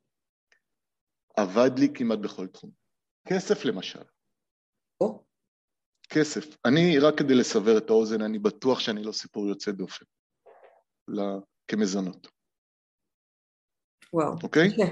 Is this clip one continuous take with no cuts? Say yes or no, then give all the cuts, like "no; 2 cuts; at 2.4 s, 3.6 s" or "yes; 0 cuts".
no; 2 cuts; at 3.2 s, 11.1 s